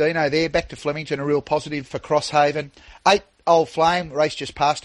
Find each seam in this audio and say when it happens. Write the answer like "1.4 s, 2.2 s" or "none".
1.9 s